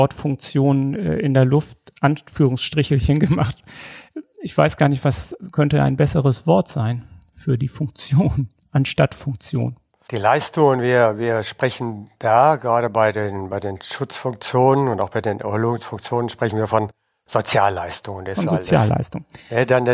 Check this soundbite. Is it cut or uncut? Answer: uncut